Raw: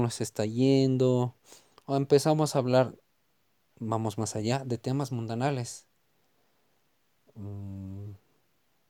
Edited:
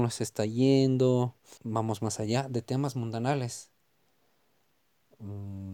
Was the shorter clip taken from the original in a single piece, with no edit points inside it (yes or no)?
no